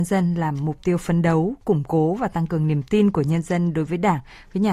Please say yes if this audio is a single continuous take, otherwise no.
yes